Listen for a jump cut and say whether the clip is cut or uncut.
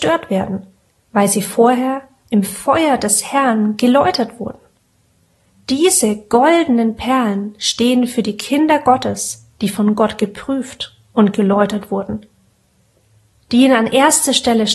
uncut